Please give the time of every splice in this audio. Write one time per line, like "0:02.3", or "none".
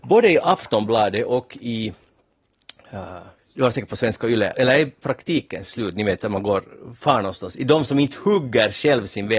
0:03.4
0:04.5